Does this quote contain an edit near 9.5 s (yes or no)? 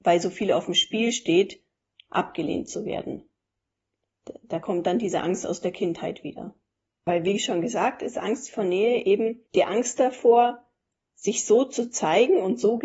yes